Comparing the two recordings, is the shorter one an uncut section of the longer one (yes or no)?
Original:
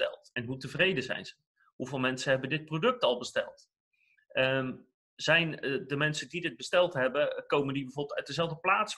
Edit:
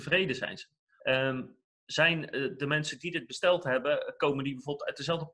no